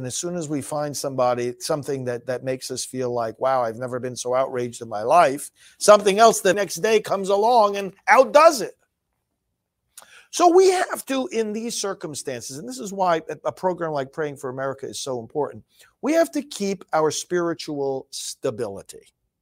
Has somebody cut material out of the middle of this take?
yes; 1 cut; at 6.5 s

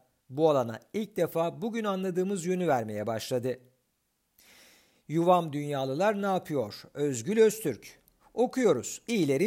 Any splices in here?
yes; 1 cut; at 8.2 s

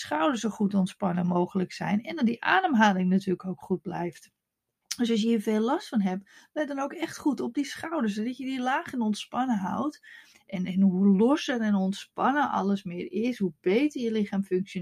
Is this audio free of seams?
no; 1 cut; at 10.3 s

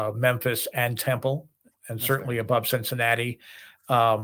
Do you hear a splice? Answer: no; 0 cuts

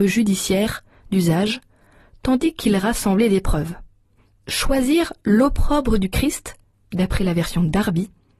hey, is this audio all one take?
yes; 0 cuts

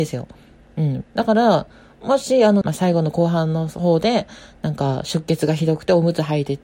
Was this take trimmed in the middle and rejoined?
yes; 2 cuts; at 1.0 s, 2.6 s

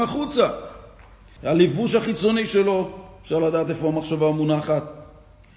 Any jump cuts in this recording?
yes; 1 cut; at 1.4 s

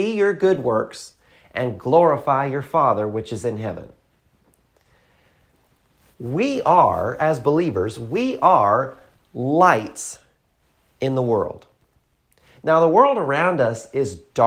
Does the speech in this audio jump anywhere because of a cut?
no; 0 cuts

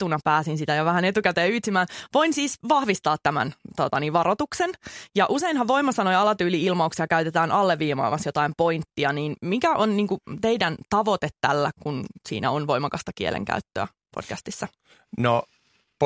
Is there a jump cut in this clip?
yes; 1 cut; at 11.7 s

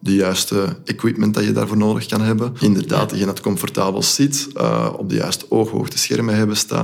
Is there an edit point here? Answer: yes; 1 cut; at 2.6 s

